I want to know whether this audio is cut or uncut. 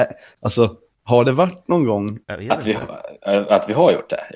cut